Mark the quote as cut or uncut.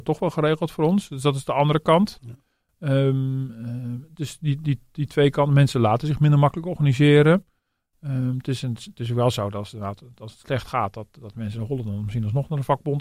cut